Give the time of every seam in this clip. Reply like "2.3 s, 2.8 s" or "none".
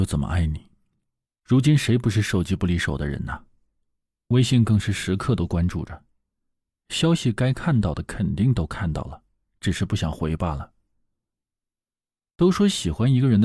1.3 s